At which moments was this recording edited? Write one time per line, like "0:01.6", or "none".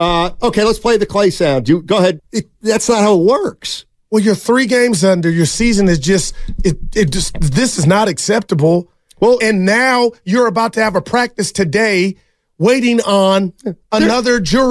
0:02.2